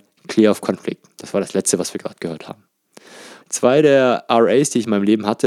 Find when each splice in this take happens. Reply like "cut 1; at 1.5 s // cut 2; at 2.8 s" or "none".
cut 1; at 3.4 s